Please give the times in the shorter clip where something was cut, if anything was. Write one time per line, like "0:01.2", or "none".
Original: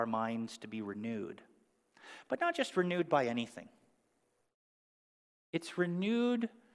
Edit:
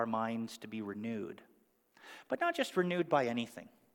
none